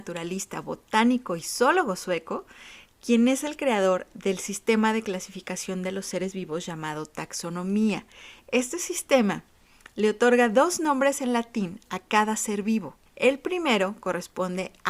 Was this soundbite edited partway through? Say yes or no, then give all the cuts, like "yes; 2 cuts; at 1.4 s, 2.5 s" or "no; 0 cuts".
yes; 2 cuts; at 8.4 s, 13.1 s